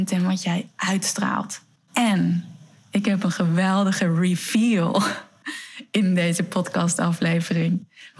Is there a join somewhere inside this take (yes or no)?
yes